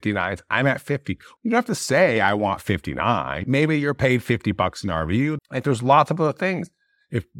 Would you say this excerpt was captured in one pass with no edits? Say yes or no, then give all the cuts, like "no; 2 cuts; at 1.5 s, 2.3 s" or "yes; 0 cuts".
no; 3 cuts; at 1.4 s, 3.4 s, 5.4 s